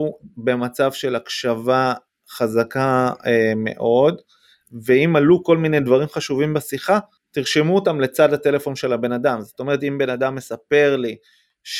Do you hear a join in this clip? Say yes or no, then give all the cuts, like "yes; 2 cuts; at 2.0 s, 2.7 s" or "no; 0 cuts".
no; 0 cuts